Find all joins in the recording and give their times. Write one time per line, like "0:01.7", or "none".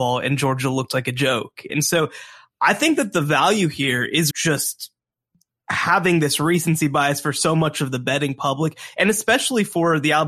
0:01.7
0:04.3